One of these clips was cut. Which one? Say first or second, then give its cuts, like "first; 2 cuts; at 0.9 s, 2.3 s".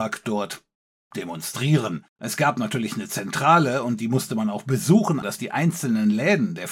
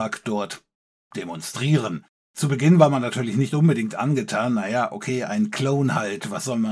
first; 2 cuts; at 2.2 s, 5.2 s